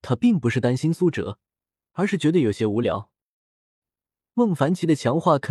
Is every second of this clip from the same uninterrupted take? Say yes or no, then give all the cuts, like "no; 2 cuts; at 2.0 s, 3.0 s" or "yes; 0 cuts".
no; 1 cut; at 3.8 s